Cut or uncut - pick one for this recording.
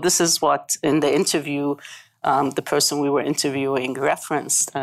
uncut